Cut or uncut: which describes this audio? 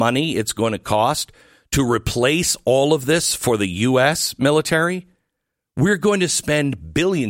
uncut